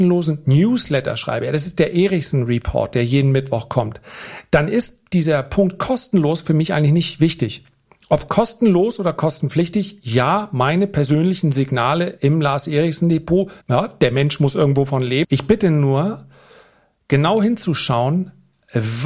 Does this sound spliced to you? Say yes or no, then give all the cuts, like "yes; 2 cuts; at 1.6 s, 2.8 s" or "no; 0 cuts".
yes; 2 cuts; at 13.6 s, 15.2 s